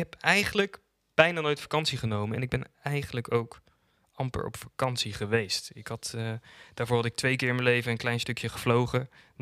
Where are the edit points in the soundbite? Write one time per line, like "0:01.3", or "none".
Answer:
none